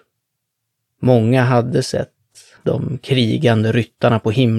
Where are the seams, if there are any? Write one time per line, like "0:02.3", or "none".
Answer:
0:02.6